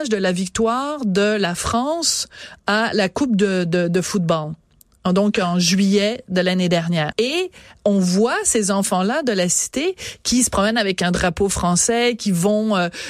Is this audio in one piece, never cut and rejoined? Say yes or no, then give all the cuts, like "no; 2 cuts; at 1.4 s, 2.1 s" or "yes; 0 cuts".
no; 1 cut; at 7.1 s